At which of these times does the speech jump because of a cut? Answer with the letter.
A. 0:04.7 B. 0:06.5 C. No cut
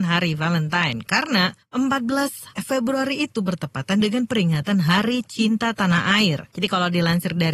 C